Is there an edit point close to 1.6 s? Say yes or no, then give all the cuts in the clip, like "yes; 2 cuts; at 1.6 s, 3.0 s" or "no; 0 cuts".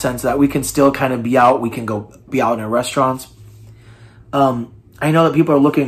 no; 0 cuts